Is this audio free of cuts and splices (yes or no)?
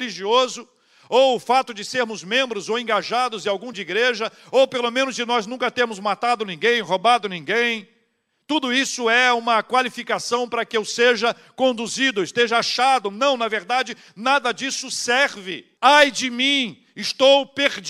no